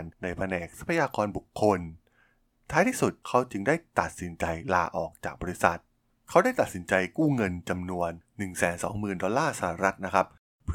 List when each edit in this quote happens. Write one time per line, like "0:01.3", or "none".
none